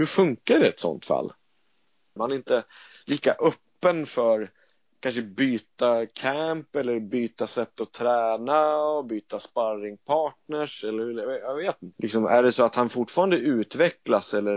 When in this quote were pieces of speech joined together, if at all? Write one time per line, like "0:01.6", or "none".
0:02.2
0:11.9